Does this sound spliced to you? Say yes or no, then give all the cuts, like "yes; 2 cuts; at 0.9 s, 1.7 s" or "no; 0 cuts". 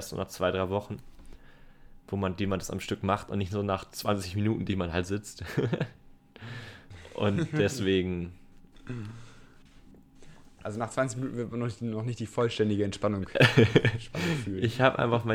no; 0 cuts